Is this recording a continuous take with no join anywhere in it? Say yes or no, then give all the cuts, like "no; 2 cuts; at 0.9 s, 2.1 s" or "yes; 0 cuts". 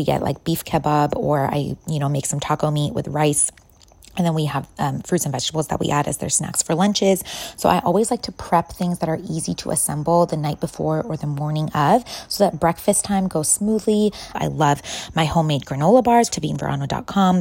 no; 2 cuts; at 14.3 s, 16.3 s